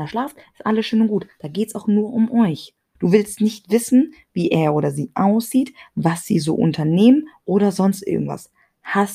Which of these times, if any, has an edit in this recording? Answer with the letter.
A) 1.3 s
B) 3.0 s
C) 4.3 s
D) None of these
B